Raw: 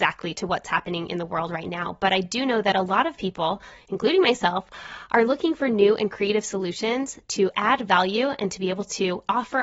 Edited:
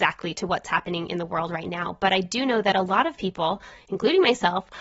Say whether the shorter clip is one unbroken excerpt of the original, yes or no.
yes